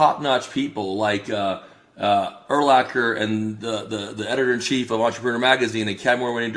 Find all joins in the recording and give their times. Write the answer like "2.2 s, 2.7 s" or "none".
none